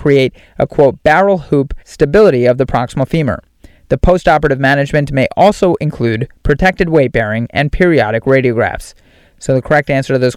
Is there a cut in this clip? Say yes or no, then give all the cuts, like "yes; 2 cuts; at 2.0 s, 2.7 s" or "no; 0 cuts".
no; 0 cuts